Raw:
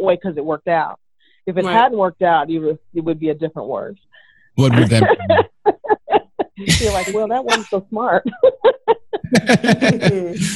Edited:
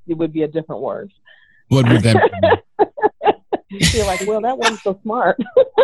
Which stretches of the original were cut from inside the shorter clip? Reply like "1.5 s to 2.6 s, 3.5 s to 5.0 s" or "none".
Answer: none